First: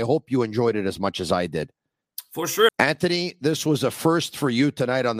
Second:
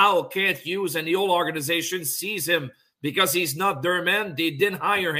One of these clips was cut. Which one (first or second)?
first